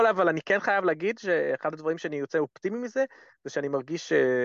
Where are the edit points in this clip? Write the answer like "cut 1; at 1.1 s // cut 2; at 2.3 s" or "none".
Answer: none